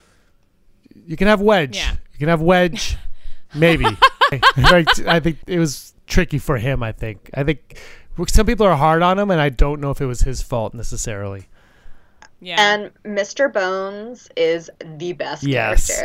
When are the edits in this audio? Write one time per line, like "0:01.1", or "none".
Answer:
none